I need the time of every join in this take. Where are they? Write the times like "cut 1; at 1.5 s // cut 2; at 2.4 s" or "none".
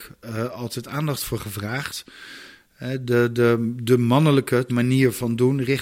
cut 1; at 4.7 s